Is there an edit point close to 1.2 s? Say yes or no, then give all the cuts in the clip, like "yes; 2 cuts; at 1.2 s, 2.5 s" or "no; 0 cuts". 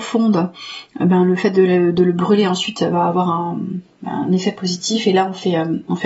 no; 0 cuts